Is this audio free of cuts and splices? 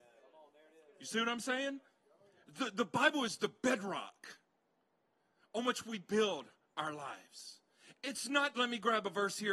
no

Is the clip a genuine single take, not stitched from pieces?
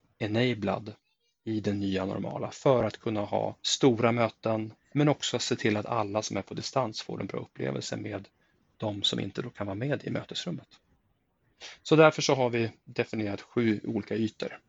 no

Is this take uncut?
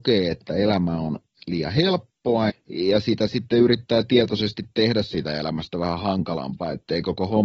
no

